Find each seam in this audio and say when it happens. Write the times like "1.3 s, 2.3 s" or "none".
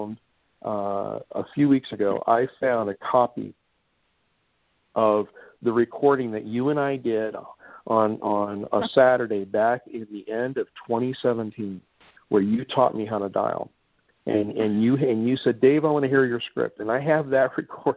none

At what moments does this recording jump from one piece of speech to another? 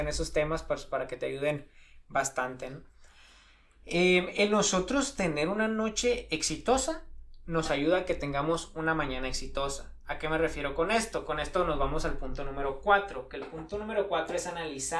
none

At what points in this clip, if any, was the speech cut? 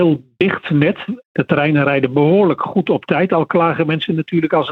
1.2 s

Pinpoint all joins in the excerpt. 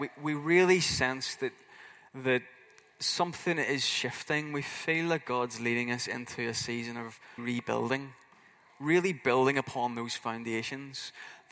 7.4 s

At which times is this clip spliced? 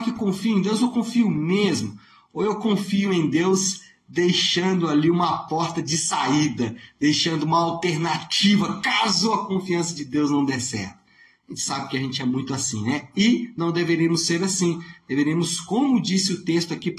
none

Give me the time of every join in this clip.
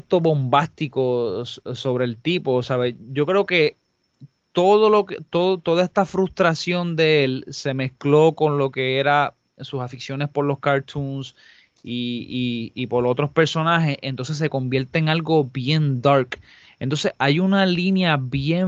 none

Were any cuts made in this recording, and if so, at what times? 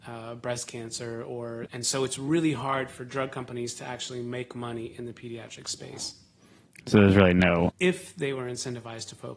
1.7 s, 7.7 s

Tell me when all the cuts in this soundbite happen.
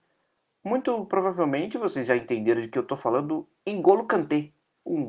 none

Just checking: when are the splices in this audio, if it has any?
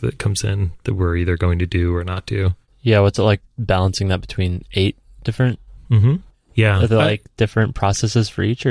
6.3 s

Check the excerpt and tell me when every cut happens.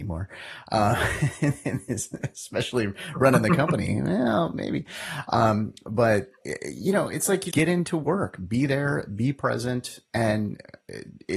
7.5 s

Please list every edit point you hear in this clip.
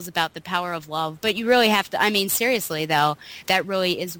1.2 s

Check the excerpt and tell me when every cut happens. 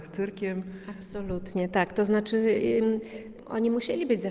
none

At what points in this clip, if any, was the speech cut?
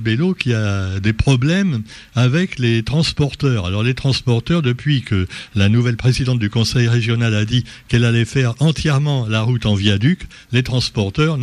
none

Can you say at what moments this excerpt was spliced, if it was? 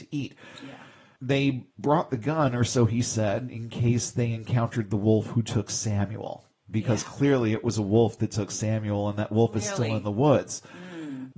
none

